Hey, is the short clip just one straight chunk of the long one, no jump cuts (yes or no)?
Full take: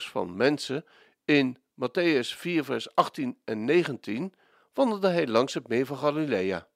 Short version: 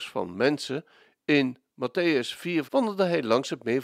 no